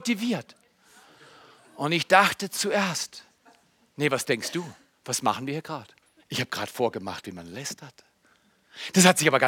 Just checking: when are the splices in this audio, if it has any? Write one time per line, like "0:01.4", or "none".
0:06.2